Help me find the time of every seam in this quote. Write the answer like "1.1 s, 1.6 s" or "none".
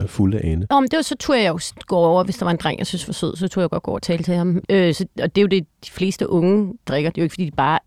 4.6 s, 6.8 s